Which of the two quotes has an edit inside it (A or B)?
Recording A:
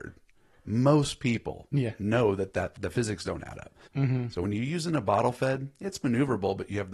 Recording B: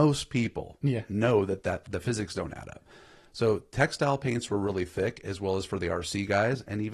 A